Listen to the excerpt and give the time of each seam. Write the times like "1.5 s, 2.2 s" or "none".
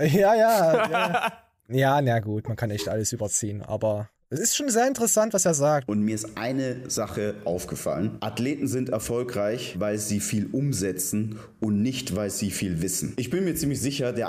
4.4 s, 5.9 s